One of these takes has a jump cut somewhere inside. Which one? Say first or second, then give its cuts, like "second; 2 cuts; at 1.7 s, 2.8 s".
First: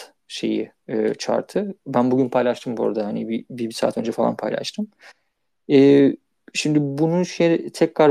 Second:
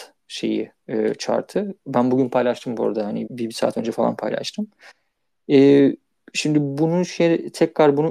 second; 1 cut; at 3.3 s